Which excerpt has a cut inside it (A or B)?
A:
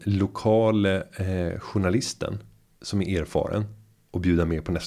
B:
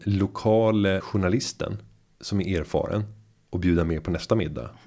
B